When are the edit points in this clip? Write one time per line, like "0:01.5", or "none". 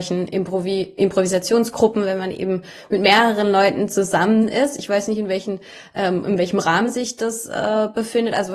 0:01.0